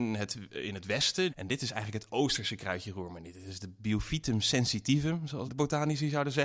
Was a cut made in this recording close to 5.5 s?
yes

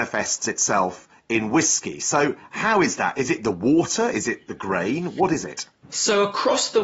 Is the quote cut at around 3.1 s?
no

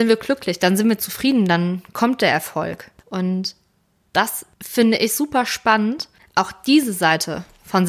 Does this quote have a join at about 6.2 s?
yes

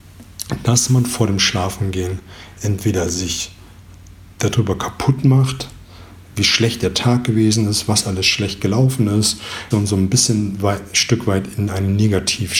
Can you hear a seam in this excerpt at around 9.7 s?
yes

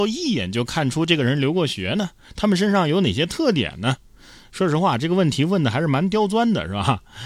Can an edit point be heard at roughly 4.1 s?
no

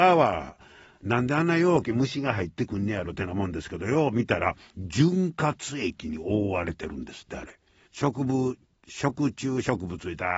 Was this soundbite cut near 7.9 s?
yes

